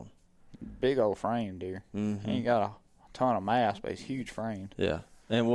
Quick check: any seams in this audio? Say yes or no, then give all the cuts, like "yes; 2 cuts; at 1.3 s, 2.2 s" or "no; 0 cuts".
no; 0 cuts